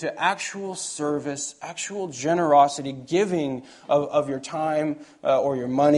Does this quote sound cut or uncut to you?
uncut